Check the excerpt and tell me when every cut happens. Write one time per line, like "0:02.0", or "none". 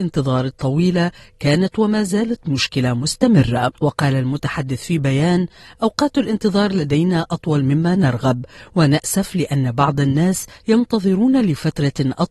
0:03.7

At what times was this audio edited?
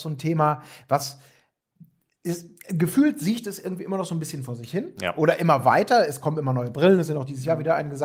none

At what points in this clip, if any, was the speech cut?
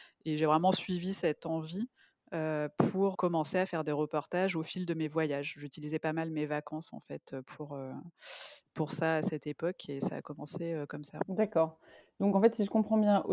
0:03.1

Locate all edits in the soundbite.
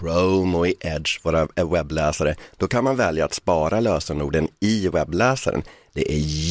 none

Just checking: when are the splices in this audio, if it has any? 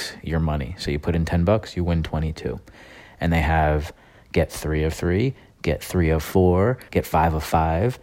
0:06.9

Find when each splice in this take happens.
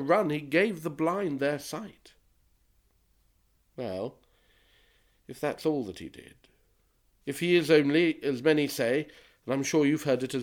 none

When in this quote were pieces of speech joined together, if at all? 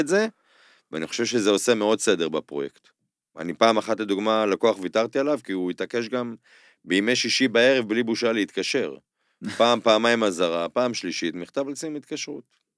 none

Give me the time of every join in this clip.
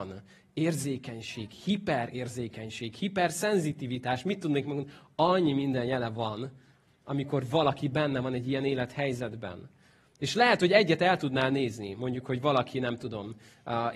none

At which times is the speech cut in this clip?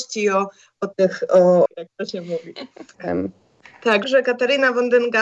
0:01.7
0:02.9
0:04.0

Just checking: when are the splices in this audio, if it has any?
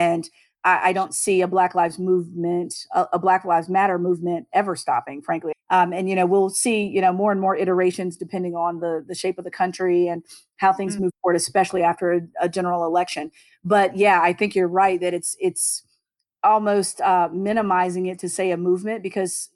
0:05.5

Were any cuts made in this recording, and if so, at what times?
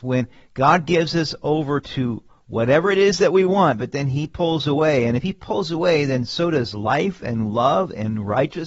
none

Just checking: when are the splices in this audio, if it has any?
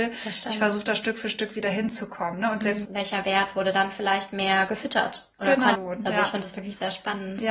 0:02.8
0:05.7

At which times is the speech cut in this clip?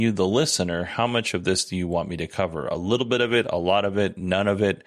none

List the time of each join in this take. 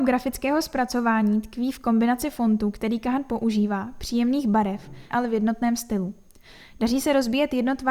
0:05.1

